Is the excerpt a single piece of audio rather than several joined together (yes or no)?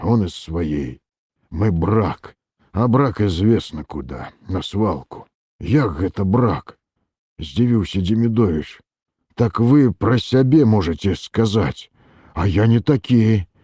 yes